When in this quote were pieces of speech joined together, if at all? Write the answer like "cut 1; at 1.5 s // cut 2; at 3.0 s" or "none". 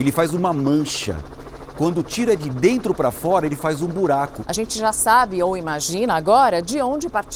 cut 1; at 4.4 s